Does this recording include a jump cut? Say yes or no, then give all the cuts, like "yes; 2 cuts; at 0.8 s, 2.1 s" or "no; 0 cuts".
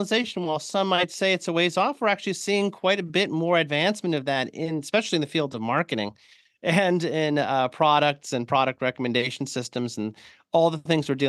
no; 0 cuts